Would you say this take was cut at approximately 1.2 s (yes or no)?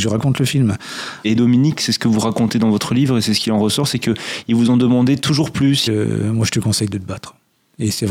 yes